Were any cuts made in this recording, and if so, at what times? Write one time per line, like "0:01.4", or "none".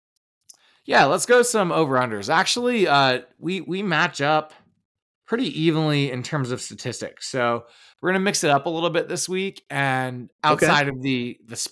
none